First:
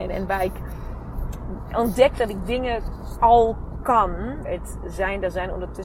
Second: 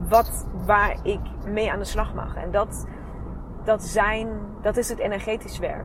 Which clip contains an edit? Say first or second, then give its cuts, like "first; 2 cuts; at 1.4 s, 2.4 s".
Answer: first; 1 cut; at 4.4 s